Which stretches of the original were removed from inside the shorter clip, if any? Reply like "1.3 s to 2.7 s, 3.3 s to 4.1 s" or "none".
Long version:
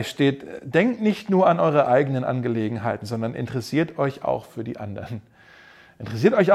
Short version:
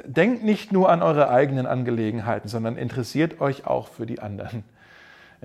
none